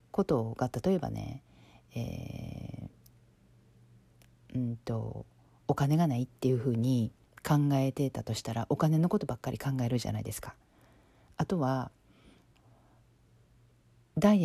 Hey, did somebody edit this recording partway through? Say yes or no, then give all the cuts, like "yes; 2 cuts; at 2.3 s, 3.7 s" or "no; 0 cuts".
yes; 1 cut; at 12.5 s